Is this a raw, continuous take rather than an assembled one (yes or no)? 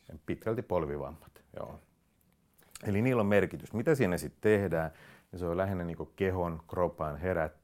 yes